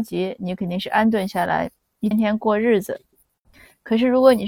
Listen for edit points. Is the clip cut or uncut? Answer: cut